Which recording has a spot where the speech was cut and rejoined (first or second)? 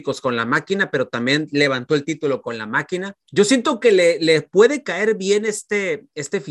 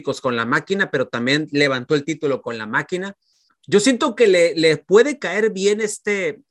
first